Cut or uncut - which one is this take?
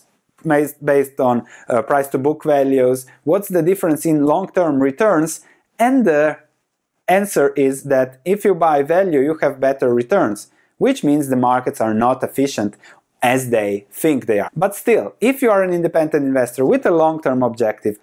cut